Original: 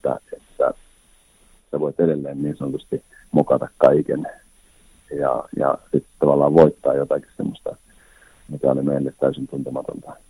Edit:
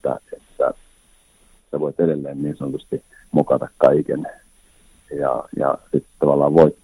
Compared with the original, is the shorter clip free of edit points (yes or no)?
yes